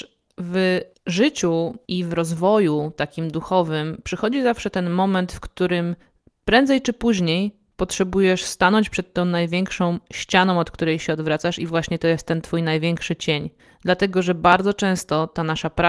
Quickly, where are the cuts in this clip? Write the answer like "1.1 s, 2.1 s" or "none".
none